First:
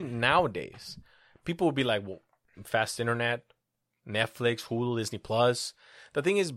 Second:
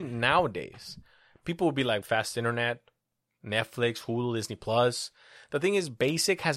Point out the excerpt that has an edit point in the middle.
second; 1 cut; at 2.0 s

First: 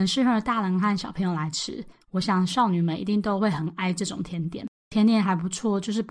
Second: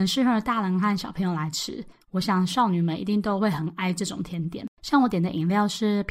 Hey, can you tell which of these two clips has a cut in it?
second; 1 cut; at 4.8 s

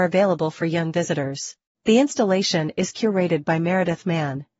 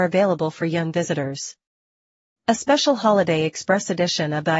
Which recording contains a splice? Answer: first; 1 cut; at 1.7 s

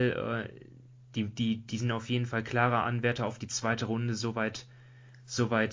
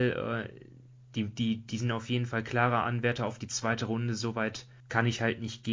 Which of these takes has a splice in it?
second; 1 cut; at 4.8 s

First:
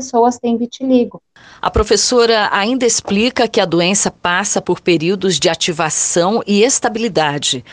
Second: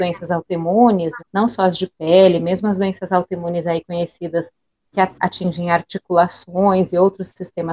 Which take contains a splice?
second; 1 cut; at 1.2 s

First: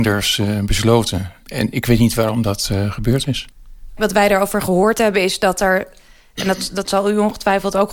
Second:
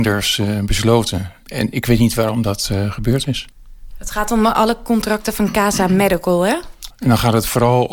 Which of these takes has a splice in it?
second; 2 cuts; at 3.9 s, 6.9 s

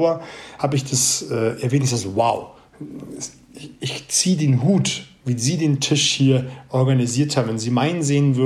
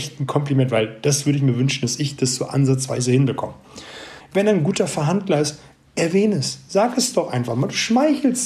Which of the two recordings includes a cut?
second; 1 cut; at 4.2 s

